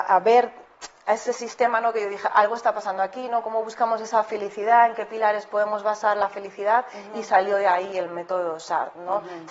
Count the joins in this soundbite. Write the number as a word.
zero